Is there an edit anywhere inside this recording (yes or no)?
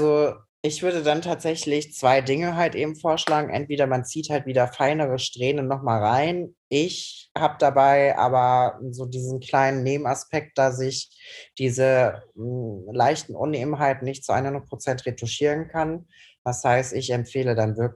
no